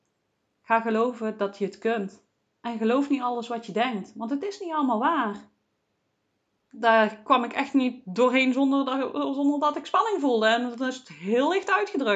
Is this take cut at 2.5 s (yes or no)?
no